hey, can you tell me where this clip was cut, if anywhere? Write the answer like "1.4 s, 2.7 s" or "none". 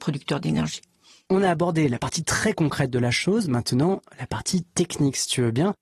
none